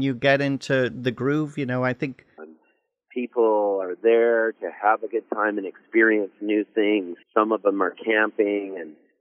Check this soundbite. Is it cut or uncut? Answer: cut